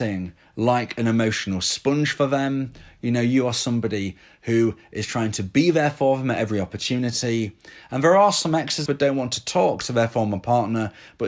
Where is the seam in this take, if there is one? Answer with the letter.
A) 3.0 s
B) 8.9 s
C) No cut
B